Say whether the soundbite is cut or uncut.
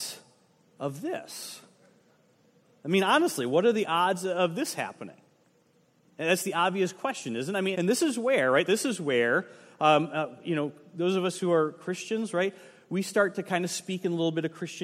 cut